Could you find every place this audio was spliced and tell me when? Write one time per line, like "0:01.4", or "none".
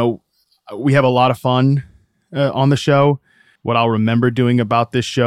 0:03.6